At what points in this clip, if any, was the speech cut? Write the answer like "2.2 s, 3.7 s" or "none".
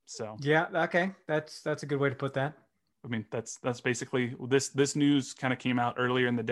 2.9 s